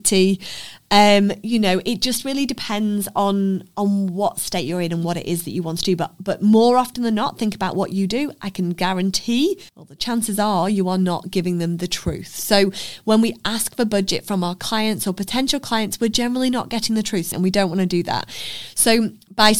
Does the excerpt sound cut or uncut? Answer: cut